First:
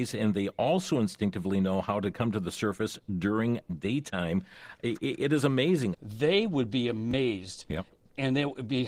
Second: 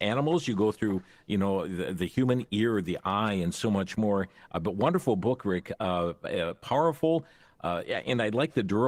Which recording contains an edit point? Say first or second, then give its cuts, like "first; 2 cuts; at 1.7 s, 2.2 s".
first; 1 cut; at 5.9 s